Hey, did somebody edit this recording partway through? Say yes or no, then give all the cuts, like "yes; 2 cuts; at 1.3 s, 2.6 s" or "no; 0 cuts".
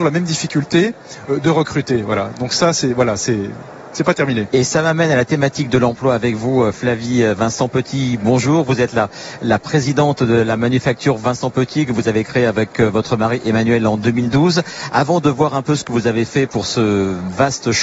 no; 0 cuts